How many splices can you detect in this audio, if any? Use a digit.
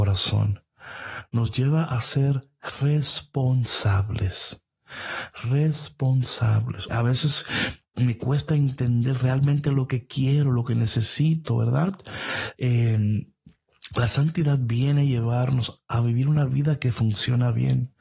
1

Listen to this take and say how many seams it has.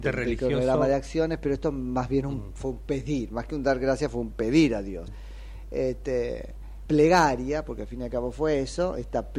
2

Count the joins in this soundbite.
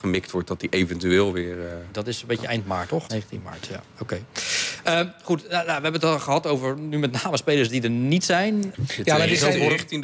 2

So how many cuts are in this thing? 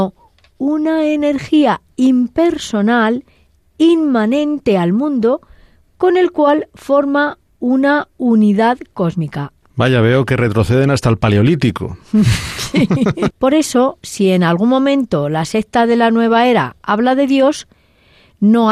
2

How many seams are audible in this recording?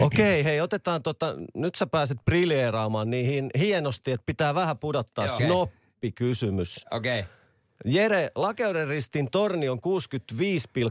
1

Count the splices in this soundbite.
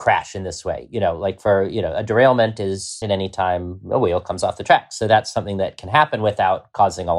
1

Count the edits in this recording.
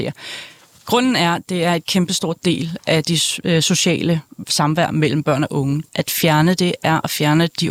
1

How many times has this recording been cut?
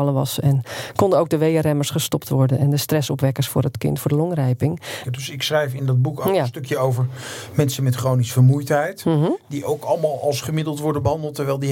1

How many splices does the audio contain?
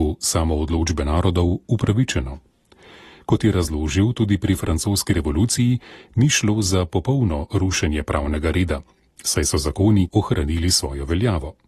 1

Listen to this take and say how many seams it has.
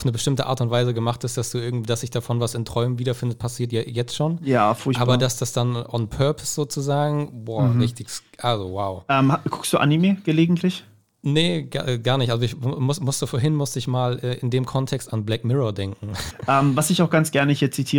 1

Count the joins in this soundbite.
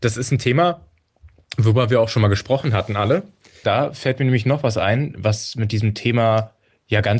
1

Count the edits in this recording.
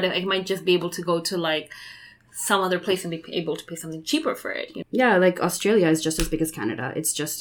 1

